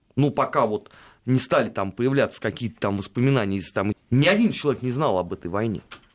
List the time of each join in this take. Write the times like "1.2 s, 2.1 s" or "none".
3.9 s